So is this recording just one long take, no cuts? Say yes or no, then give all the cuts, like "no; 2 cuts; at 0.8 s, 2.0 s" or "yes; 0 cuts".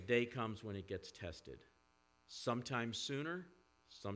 yes; 0 cuts